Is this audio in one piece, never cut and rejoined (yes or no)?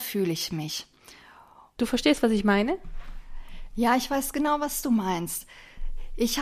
no